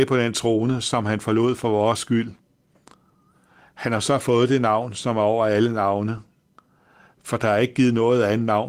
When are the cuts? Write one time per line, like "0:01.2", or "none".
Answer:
none